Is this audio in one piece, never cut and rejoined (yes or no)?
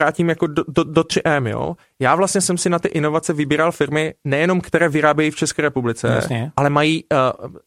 yes